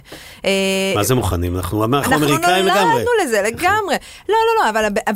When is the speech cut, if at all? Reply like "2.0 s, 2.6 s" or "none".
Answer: none